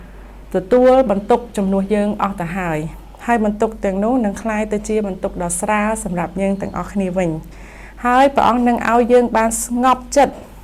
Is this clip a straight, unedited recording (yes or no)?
yes